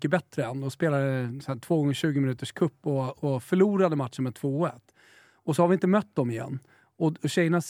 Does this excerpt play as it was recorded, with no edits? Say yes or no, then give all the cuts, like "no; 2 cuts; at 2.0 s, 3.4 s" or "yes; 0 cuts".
yes; 0 cuts